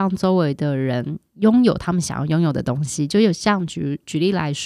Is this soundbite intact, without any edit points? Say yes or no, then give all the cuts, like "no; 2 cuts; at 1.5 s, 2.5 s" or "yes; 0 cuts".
yes; 0 cuts